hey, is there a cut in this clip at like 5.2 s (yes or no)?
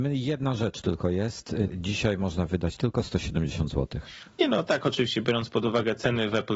no